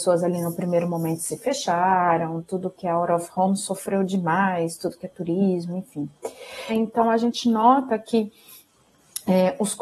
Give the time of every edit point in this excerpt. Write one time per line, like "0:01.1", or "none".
0:06.7